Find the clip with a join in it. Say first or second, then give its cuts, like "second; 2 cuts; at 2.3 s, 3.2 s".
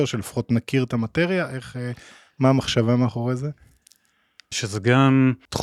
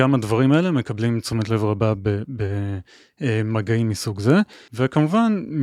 first; 1 cut; at 4.5 s